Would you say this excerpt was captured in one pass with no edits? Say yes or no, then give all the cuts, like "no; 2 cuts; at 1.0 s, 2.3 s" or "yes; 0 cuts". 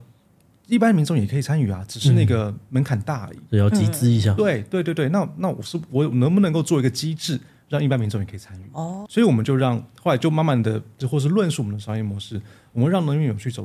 no; 2 cuts; at 9.1 s, 11.0 s